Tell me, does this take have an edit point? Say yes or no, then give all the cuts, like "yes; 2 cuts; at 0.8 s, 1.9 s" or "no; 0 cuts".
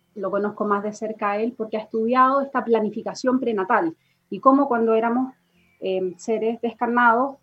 no; 0 cuts